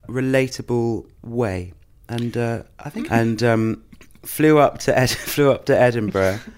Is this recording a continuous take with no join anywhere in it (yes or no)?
no